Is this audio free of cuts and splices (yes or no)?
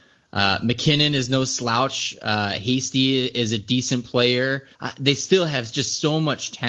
no